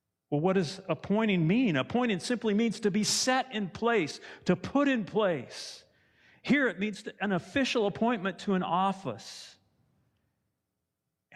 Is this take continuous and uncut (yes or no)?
yes